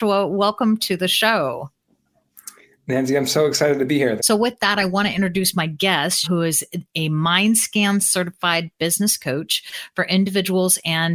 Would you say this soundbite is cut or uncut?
cut